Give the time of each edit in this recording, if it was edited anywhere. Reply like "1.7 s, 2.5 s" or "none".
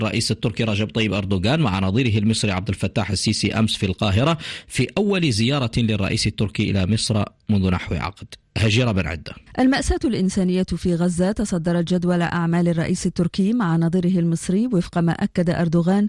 9.5 s

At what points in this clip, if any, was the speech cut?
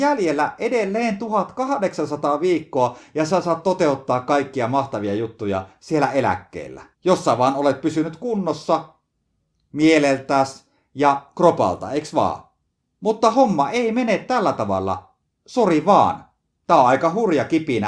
6.9 s

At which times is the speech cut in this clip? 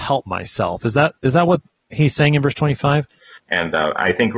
3.4 s

